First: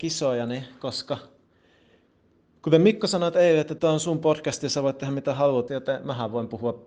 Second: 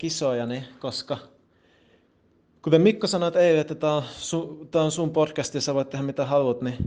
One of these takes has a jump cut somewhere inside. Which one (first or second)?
first